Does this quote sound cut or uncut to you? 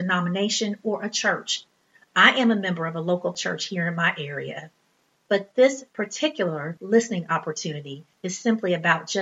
uncut